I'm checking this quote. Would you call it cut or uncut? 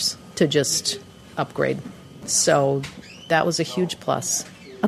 cut